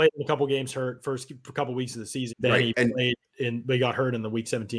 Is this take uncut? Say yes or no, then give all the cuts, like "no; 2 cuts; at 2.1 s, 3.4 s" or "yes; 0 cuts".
no; 1 cut; at 2.3 s